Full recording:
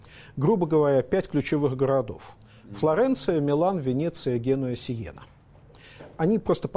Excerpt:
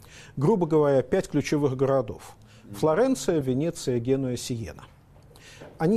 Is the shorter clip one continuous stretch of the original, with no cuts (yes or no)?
no